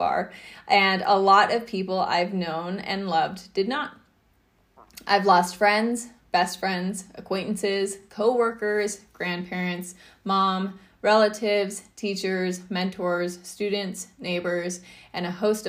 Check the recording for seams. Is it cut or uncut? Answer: uncut